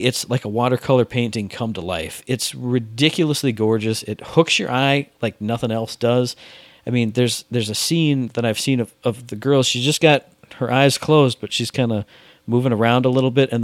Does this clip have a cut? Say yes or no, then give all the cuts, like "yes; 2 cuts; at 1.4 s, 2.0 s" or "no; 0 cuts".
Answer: no; 0 cuts